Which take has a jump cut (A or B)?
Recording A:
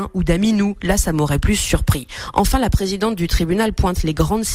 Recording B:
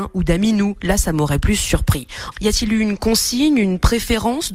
B